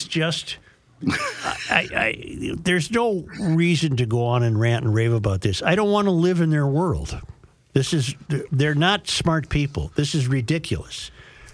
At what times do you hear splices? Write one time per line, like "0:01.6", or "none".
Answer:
none